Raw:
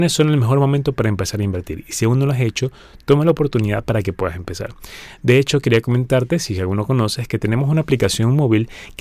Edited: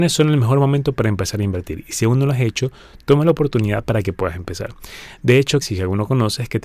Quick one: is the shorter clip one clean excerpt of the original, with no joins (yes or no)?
no